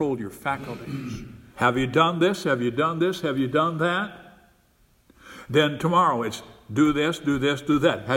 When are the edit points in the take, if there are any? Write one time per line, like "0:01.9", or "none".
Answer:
0:01.5